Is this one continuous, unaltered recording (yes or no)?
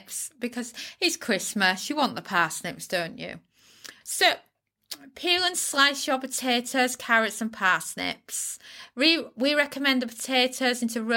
no